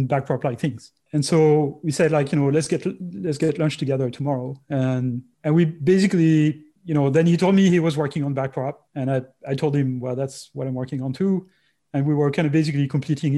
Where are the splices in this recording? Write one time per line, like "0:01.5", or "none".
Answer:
none